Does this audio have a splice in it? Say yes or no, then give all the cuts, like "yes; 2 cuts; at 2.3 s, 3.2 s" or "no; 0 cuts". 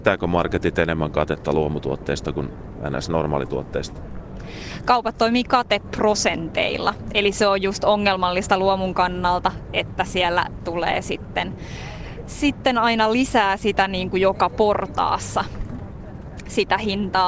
no; 0 cuts